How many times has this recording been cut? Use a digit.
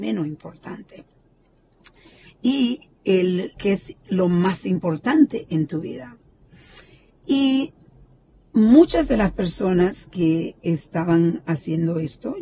2